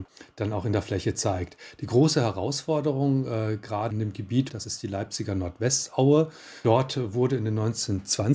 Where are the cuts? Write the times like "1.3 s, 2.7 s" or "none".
4.5 s